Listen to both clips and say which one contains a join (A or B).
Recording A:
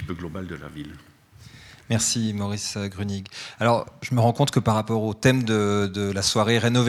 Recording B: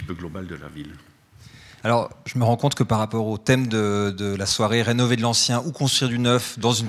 B